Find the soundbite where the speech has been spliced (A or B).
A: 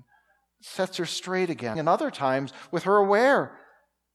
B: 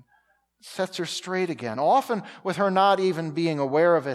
A